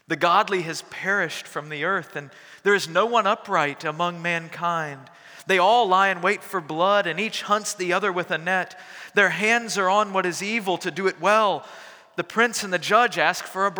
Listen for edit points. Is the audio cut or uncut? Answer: uncut